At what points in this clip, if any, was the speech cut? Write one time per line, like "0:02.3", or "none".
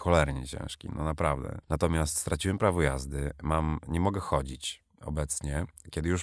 0:01.6